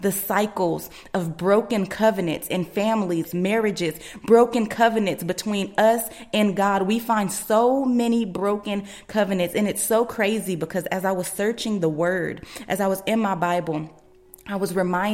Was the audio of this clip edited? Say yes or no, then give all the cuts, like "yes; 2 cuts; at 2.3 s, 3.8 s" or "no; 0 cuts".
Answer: yes; 1 cut; at 3.2 s